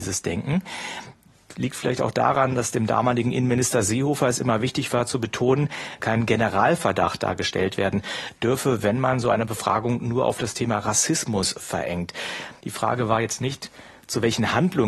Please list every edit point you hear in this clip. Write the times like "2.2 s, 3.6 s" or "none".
6.0 s, 12.6 s